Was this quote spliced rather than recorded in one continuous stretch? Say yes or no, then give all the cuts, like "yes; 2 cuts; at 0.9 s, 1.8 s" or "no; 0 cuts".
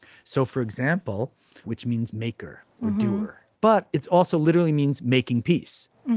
yes; 2 cuts; at 1.6 s, 3.5 s